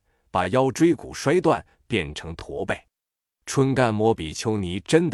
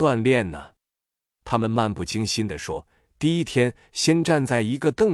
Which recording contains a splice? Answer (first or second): first